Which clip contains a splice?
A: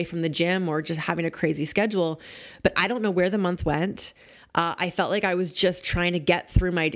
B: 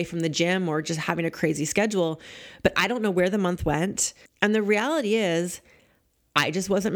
B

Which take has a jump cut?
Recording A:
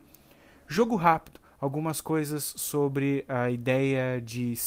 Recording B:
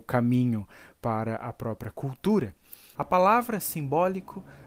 B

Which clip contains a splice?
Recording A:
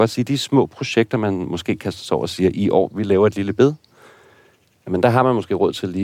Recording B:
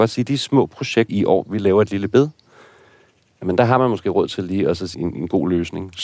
B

